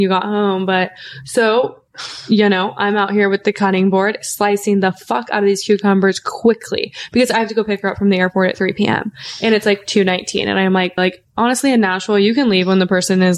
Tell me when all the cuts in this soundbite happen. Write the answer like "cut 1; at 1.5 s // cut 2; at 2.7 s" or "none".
cut 1; at 11.0 s